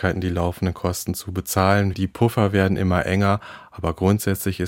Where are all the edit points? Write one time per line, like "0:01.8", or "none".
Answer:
0:01.9

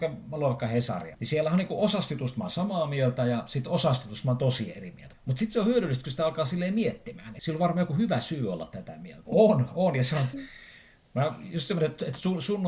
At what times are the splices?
0:05.1
0:09.2
0:10.3

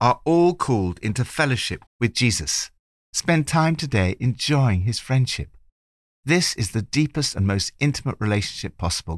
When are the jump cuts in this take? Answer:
0:01.9

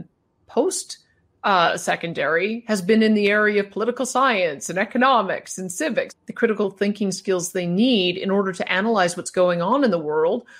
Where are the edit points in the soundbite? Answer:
0:06.1

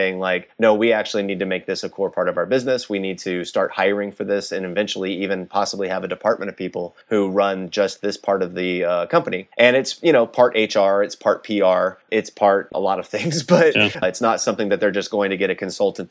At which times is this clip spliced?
0:14.0

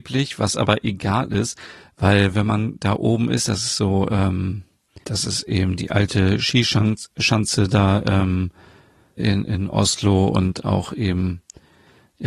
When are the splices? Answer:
0:05.0
0:09.1

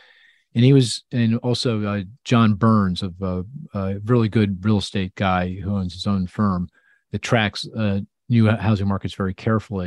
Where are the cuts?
0:01.1

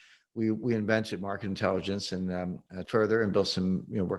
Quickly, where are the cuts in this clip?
0:02.8

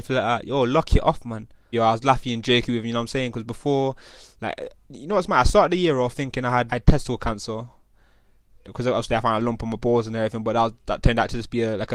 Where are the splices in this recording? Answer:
0:01.7
0:04.8
0:06.7

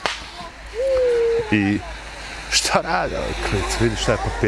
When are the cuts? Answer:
none

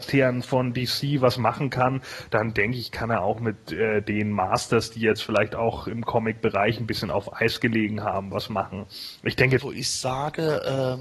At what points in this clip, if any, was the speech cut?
0:09.6

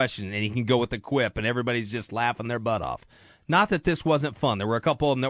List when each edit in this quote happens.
none

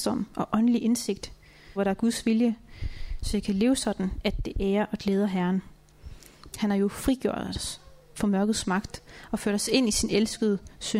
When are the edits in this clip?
0:01.8
0:06.5

